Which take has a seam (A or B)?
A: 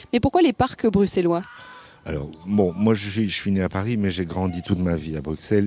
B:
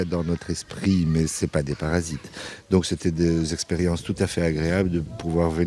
B